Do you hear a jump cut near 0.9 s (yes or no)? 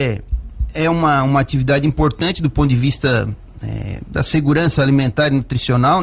no